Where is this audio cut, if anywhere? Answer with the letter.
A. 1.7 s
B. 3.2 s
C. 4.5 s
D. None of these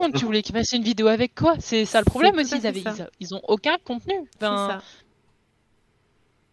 A